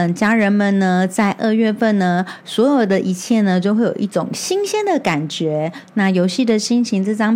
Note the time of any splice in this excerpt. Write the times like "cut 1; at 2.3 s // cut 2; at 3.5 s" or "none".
none